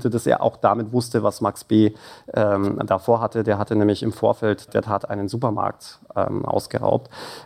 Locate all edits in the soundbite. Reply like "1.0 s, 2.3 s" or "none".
4.7 s

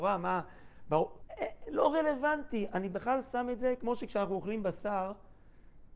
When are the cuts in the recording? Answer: 1.2 s

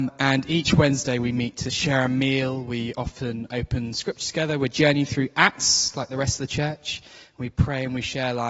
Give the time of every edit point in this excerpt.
none

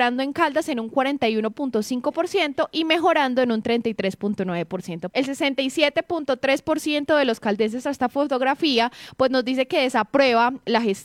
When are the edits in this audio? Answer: 5.1 s, 7.8 s

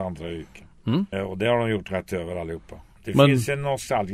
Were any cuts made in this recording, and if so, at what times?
1.1 s, 3.0 s

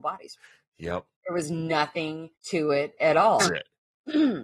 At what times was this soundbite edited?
2.4 s, 3.4 s

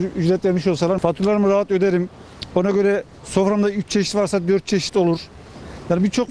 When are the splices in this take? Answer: none

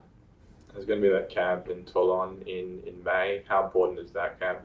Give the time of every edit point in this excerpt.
none

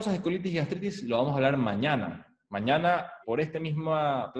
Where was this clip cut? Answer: 3.2 s

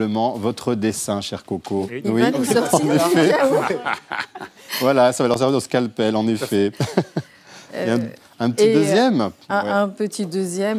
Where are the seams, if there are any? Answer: 1.9 s

